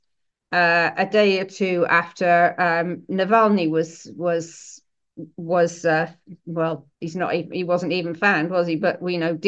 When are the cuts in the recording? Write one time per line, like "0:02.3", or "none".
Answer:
0:06.9